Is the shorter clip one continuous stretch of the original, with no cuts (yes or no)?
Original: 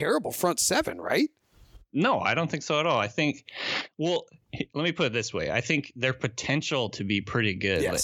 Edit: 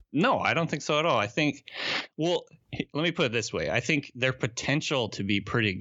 yes